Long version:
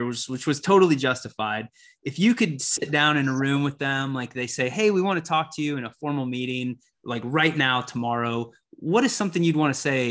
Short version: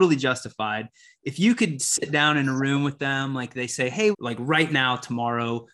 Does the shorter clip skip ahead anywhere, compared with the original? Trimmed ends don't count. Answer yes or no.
yes